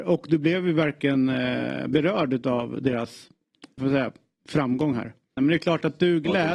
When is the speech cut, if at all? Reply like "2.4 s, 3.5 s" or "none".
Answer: 3.8 s, 5.4 s